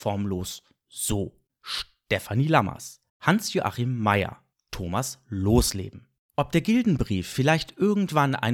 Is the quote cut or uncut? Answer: cut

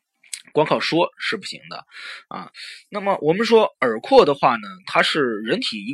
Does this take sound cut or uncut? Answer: uncut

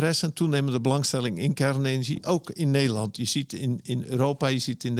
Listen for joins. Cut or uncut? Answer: uncut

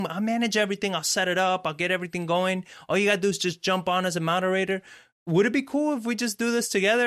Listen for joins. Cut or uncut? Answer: uncut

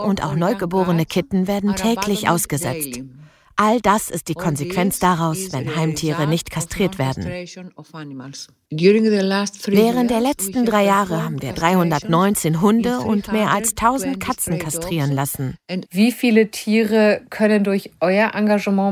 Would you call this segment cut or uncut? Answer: cut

